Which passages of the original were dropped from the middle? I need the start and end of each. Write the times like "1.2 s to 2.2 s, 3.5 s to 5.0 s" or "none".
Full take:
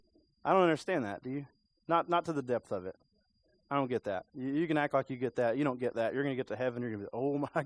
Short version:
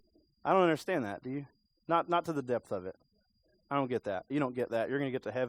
4.3 s to 5.5 s